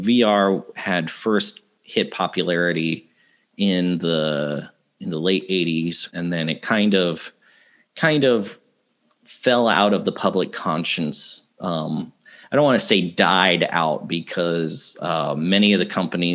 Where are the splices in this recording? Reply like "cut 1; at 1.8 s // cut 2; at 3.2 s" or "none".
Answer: cut 1; at 6.1 s

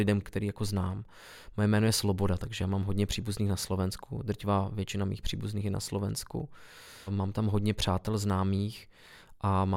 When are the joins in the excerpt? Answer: none

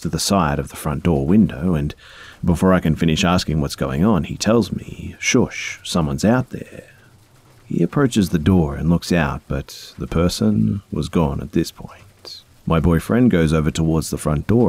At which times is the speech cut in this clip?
cut 1; at 12.5 s

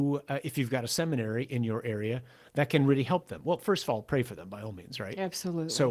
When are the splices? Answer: none

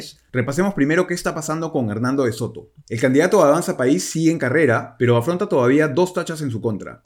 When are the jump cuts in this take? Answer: none

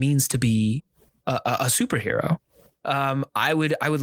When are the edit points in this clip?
cut 1; at 2.7 s

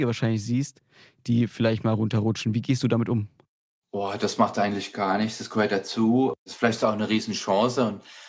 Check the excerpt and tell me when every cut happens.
none

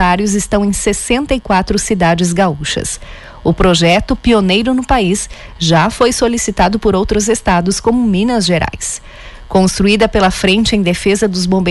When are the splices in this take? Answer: none

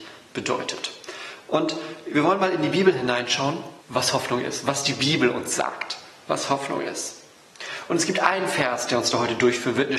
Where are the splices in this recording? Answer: cut 1; at 3.8 s

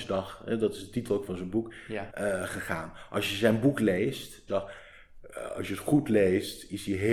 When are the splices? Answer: cut 1; at 2.1 s // cut 2; at 4.5 s

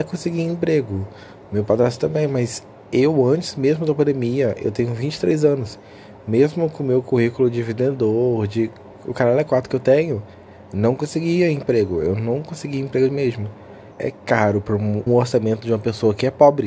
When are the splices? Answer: cut 1; at 13.9 s // cut 2; at 15.1 s

